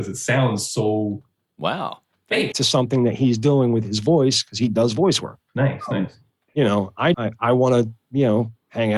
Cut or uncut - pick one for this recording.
cut